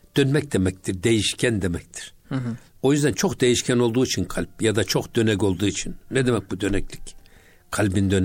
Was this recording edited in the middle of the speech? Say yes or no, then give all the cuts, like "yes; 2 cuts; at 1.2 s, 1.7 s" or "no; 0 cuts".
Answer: no; 0 cuts